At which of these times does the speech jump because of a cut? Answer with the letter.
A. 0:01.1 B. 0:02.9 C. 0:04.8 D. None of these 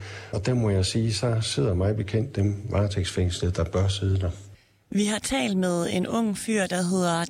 D